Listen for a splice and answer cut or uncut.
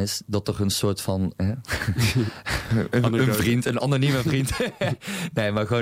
cut